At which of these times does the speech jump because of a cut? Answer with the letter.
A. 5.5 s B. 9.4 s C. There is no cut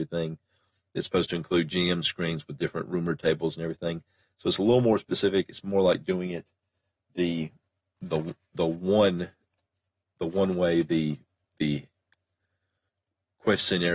C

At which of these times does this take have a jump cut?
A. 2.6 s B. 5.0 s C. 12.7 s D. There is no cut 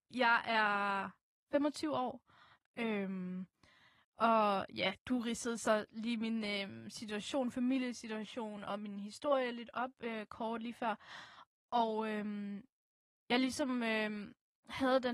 A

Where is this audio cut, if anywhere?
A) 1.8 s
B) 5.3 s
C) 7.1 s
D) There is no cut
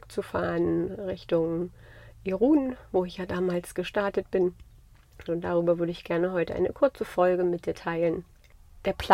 B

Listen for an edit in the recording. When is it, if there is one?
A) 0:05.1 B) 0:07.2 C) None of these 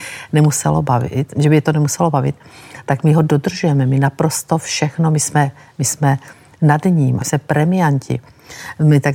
B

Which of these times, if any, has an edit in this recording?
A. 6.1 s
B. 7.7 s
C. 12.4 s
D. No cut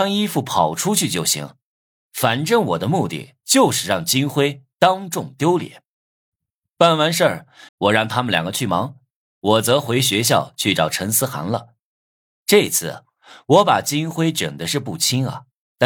B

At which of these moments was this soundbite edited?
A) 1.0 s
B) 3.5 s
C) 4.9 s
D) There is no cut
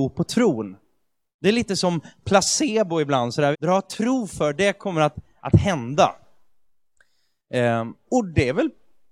B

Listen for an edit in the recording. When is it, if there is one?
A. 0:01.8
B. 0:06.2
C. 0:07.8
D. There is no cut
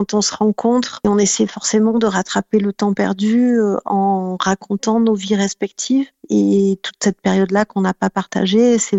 D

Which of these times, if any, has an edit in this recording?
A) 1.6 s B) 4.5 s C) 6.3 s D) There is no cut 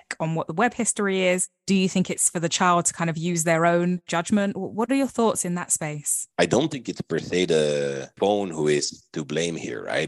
C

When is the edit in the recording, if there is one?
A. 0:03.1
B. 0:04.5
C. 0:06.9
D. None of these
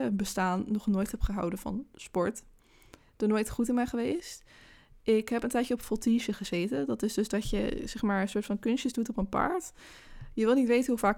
D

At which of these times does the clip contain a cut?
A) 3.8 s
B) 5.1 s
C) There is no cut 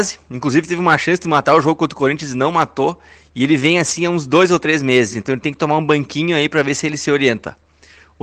C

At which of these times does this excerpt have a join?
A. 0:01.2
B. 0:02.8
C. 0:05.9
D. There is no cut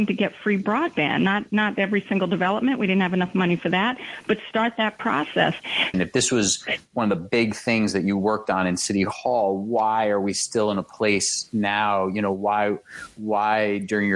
C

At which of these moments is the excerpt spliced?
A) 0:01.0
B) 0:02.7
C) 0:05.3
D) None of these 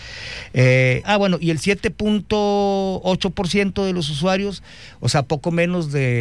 A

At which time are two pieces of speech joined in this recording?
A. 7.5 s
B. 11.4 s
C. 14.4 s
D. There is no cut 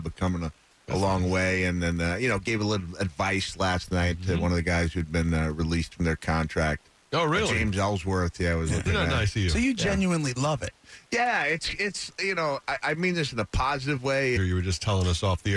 C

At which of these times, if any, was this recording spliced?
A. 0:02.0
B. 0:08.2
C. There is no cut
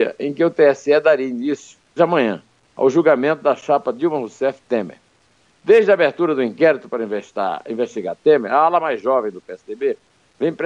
A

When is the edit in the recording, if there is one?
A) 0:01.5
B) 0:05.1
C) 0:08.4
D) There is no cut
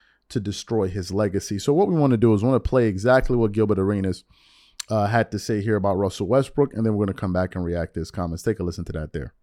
D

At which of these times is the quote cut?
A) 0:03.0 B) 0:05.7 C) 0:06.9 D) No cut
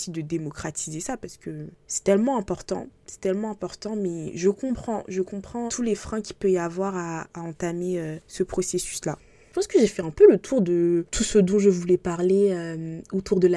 B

